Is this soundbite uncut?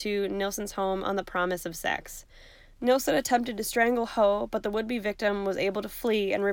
yes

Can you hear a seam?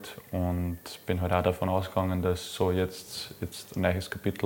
no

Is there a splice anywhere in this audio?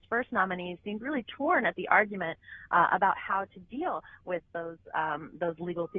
no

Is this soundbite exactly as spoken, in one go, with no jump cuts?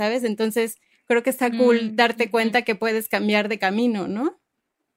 yes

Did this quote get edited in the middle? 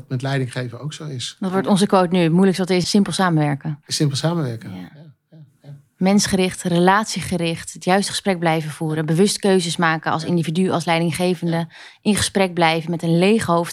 yes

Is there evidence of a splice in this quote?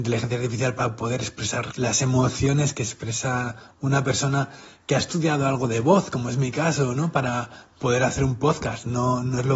yes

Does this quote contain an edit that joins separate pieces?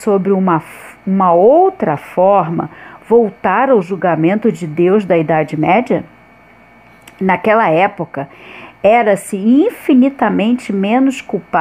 no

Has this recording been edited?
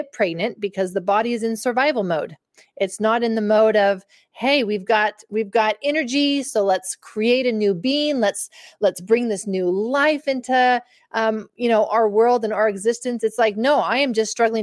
no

